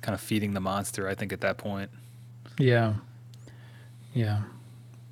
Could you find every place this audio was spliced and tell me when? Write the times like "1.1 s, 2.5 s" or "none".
none